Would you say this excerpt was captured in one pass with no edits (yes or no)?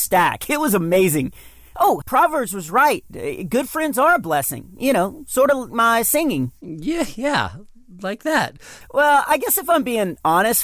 no